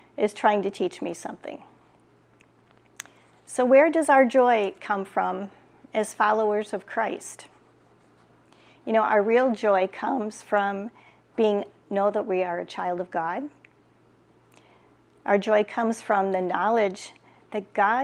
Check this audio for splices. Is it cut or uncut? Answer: uncut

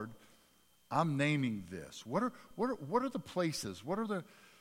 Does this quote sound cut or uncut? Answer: uncut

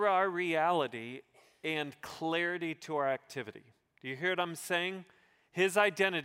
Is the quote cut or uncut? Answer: uncut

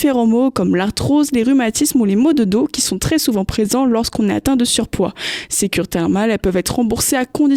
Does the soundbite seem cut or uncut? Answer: uncut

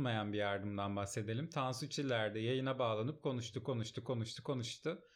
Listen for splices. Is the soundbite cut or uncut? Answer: uncut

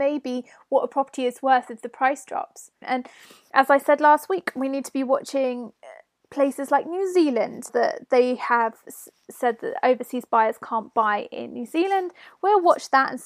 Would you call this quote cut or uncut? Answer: cut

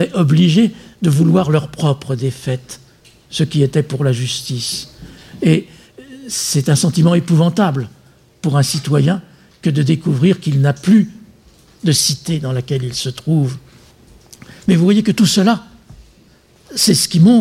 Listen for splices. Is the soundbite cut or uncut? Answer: uncut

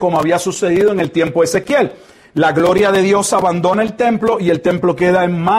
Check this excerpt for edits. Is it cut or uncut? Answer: uncut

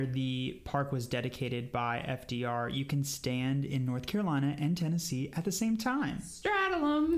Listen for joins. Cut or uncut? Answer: uncut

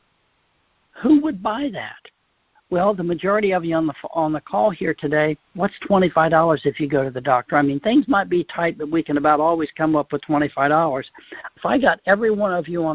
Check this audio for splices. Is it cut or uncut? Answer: cut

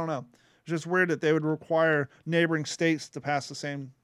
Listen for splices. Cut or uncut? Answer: uncut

